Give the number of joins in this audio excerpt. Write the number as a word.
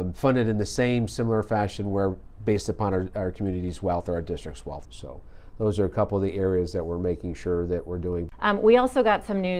one